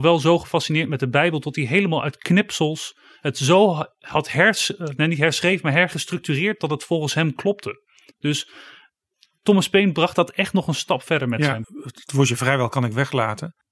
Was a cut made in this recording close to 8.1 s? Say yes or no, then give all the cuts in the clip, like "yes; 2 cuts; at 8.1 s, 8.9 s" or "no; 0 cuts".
no; 1 cut; at 11.6 s